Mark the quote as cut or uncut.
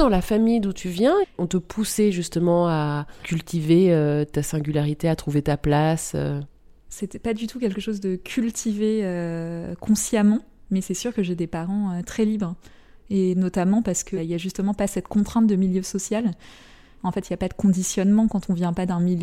cut